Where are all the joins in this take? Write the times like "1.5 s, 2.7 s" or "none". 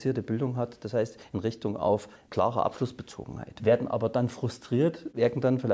3.6 s